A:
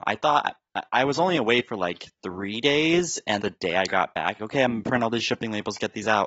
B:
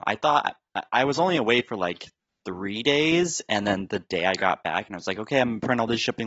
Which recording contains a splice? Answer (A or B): A